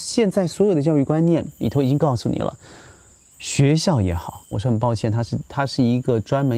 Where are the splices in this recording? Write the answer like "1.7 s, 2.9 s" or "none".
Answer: 3.3 s, 4.5 s